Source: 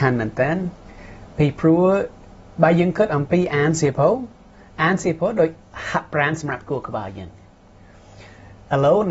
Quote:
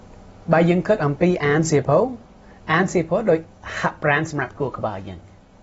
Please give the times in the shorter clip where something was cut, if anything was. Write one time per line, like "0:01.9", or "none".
none